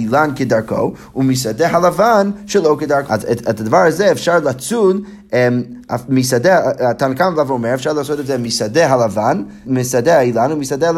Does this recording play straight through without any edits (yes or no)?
no